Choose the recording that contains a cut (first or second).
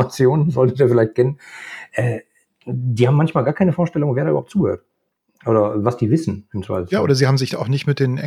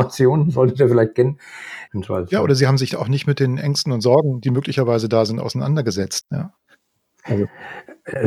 second